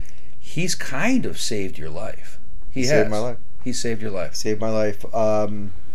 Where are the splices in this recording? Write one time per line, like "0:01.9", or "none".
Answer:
0:02.7